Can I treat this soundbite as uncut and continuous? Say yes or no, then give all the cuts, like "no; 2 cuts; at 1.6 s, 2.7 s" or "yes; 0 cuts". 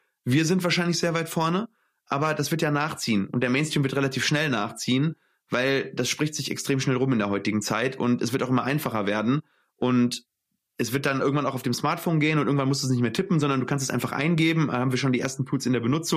yes; 0 cuts